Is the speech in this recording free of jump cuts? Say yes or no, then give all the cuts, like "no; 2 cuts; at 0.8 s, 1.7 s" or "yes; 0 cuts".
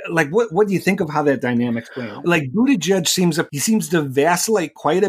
no; 1 cut; at 2.2 s